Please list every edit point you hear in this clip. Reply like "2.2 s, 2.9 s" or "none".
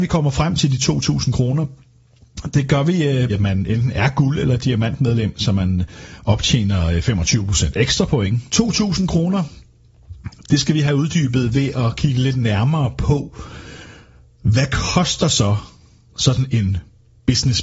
3.3 s, 8.5 s